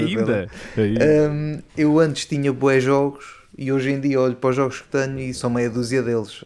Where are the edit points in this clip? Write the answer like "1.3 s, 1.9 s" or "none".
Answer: 1.7 s, 5.3 s